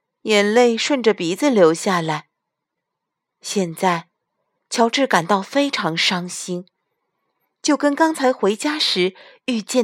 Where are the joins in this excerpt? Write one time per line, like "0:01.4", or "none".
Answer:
none